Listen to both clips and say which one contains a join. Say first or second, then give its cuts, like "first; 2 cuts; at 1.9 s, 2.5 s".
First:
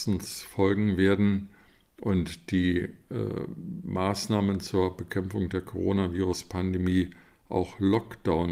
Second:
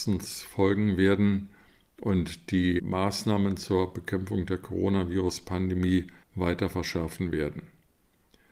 second; 2 cuts; at 2.8 s, 6.2 s